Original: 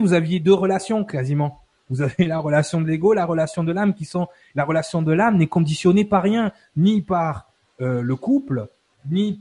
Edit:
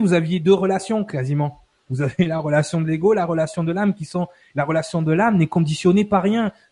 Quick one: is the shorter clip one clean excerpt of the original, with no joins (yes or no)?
yes